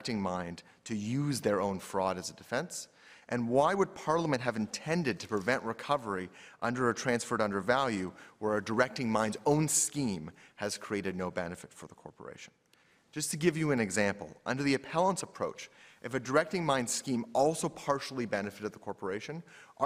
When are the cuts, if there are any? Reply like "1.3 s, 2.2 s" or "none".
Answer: none